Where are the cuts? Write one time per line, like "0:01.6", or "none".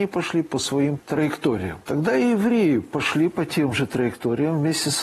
0:01.8